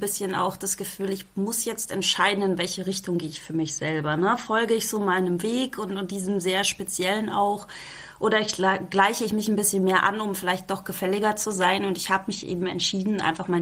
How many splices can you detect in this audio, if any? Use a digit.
0